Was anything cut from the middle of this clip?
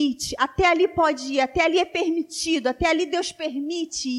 no; 0 cuts

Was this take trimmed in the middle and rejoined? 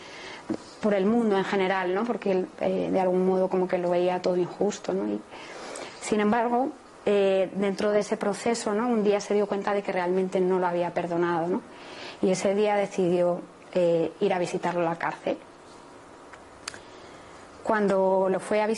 no; 0 cuts

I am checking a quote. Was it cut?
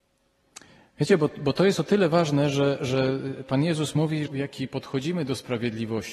yes; 1 cut; at 4.3 s

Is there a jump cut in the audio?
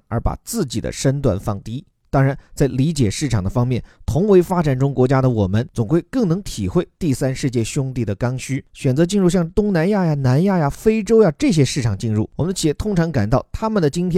no; 0 cuts

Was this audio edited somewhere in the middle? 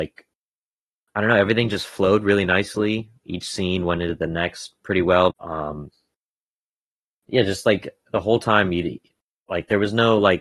yes; 1 cut; at 5.3 s

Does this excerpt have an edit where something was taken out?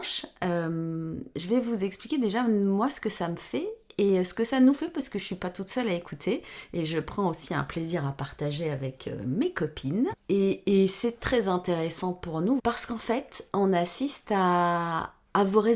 yes; 3 cuts; at 10.1 s, 11.2 s, 12.6 s

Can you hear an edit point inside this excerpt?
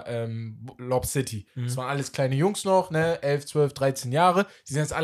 no; 0 cuts

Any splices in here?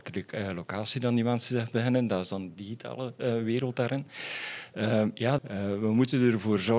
yes; 1 cut; at 5.4 s

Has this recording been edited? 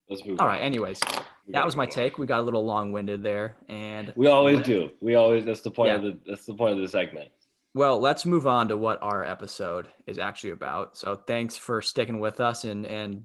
no; 0 cuts

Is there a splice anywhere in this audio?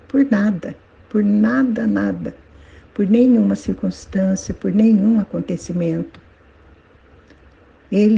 no; 0 cuts

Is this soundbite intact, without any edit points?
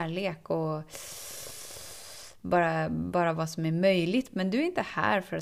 yes; 0 cuts

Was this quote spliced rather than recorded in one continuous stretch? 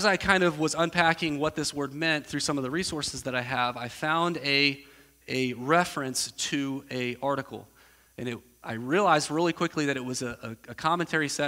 no; 0 cuts

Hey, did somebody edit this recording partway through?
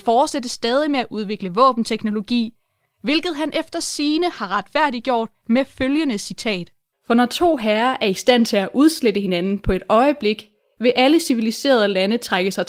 yes; 1 cut; at 6.9 s

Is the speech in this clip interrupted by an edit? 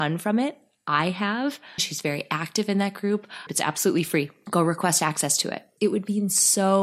yes; 3 cuts; at 1.8 s, 3.5 s, 5.8 s

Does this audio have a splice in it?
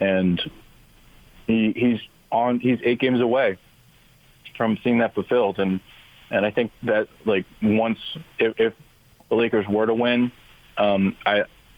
no; 0 cuts

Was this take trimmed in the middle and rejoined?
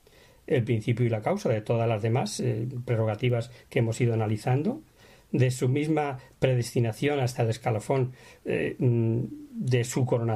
no; 0 cuts

